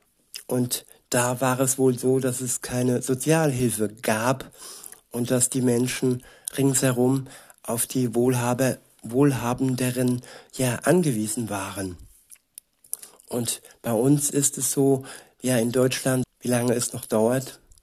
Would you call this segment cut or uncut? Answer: cut